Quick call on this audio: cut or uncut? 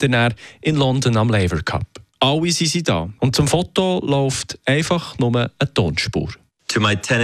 cut